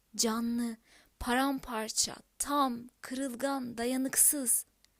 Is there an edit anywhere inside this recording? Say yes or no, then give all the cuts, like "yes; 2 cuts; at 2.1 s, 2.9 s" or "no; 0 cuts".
no; 0 cuts